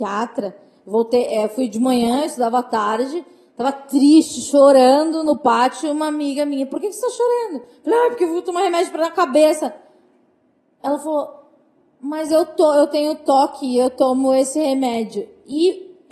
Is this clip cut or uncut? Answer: uncut